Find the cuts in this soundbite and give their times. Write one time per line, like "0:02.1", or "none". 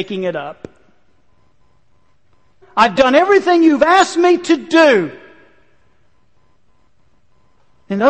0:02.6